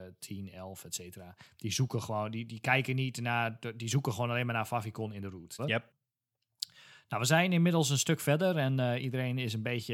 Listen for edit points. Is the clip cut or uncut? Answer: cut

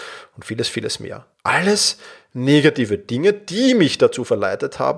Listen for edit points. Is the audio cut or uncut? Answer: cut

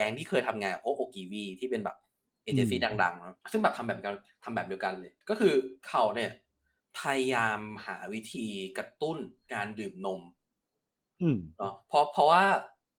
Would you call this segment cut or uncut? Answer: cut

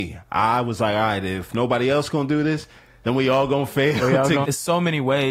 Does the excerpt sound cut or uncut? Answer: cut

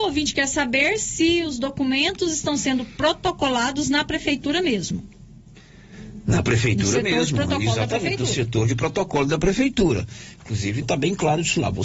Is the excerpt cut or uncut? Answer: cut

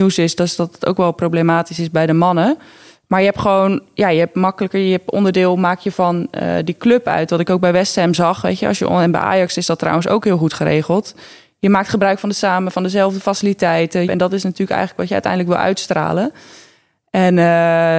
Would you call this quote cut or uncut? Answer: cut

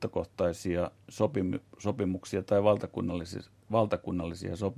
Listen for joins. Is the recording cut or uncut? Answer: uncut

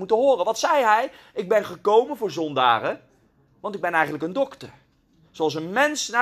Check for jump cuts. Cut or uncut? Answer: uncut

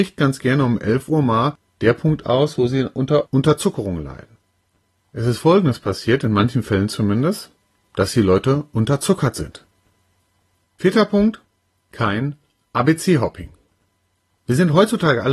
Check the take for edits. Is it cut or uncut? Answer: cut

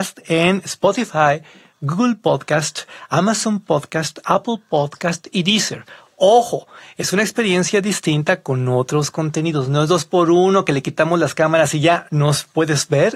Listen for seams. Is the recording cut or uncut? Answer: cut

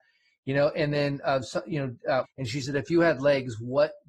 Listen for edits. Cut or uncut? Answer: cut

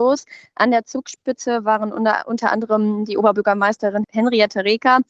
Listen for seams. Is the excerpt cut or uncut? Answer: cut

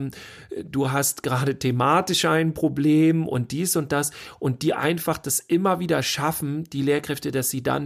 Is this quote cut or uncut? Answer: uncut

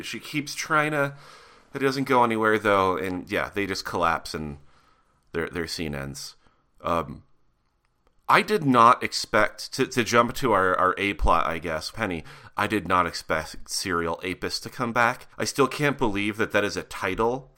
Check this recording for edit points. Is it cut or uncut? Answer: cut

